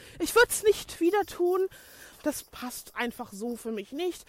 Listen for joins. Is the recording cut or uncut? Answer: cut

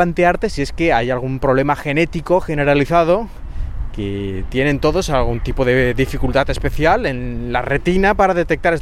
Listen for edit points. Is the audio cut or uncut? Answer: uncut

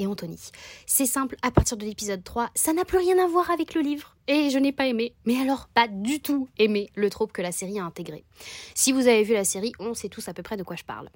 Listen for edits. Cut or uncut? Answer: uncut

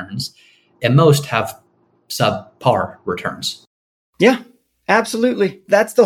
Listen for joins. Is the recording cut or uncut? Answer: uncut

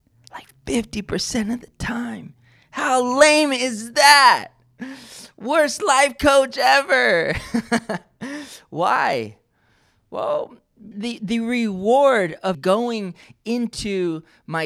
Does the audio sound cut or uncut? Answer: cut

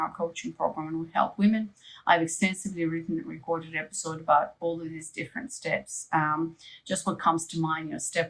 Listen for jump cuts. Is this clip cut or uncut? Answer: uncut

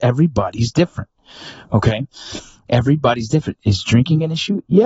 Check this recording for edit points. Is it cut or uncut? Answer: uncut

